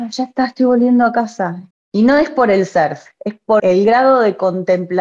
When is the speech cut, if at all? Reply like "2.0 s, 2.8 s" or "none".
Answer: 1.7 s, 3.6 s